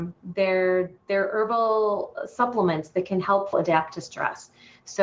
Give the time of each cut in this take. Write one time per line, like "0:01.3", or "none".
0:03.5